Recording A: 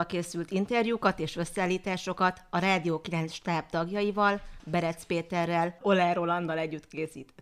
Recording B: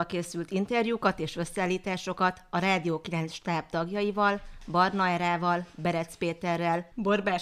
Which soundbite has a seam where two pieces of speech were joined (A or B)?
A